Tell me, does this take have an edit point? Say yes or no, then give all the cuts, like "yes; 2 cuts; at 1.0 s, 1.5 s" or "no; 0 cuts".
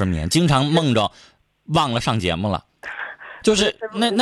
no; 0 cuts